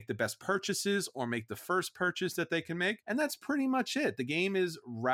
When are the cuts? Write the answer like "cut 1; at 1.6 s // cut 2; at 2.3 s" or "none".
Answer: cut 1; at 3.0 s